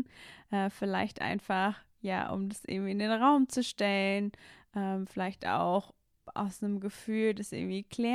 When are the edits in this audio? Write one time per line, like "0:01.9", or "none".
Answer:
none